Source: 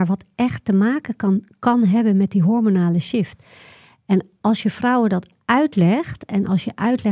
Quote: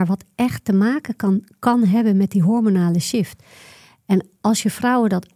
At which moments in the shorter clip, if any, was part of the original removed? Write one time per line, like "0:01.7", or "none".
none